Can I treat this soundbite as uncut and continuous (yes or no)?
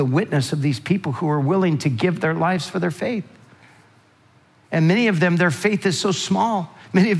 yes